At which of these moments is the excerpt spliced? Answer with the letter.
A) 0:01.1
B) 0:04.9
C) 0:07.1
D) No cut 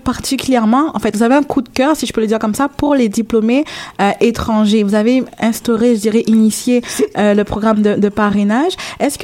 D